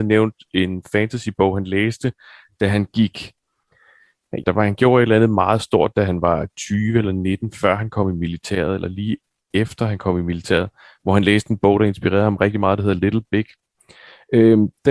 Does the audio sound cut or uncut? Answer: cut